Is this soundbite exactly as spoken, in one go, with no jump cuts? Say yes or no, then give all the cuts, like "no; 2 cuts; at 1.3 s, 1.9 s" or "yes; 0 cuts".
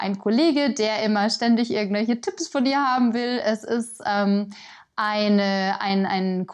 yes; 0 cuts